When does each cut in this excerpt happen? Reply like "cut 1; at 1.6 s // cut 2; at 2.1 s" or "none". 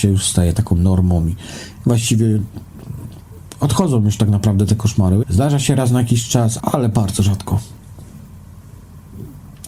cut 1; at 5.2 s // cut 2; at 6.6 s